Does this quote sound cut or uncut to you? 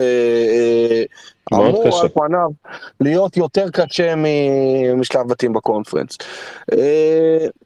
uncut